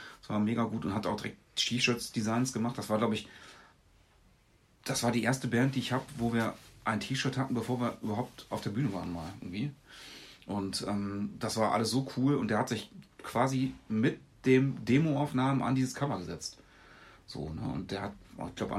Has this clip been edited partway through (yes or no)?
no